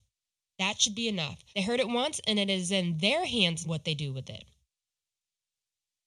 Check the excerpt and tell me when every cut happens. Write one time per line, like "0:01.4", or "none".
0:01.5
0:03.6